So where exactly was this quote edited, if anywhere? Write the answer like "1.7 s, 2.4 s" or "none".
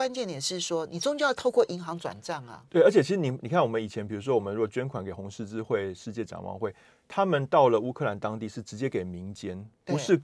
2.7 s